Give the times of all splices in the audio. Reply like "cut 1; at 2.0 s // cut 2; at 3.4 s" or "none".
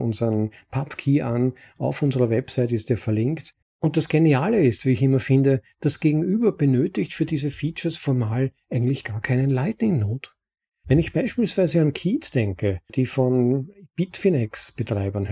cut 1; at 3.6 s // cut 2; at 10.7 s // cut 3; at 12.9 s

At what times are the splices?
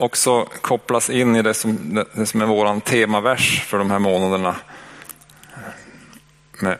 none

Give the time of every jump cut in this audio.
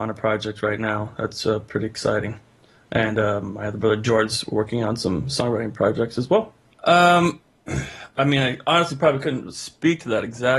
cut 1; at 6.7 s // cut 2; at 8.2 s

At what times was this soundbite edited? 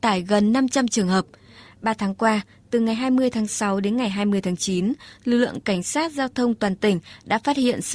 cut 1; at 1.7 s

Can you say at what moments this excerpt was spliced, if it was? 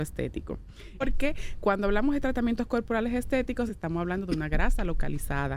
cut 1; at 1.0 s // cut 2; at 3.7 s

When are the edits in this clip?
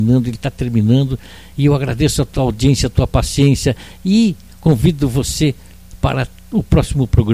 none

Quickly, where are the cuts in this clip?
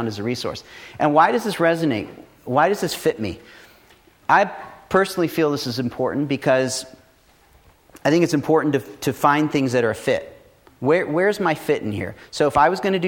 none

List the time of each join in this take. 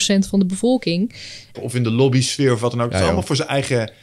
cut 1; at 1.5 s

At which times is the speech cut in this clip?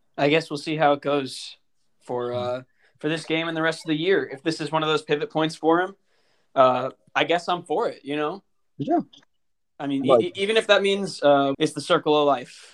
cut 1; at 11.5 s

